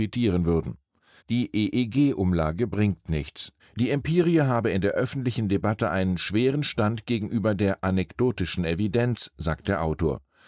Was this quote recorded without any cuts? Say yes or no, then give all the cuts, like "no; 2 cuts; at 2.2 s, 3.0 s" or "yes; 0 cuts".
no; 2 cuts; at 1.2 s, 3.6 s